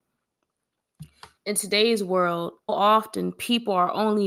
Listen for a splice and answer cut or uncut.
cut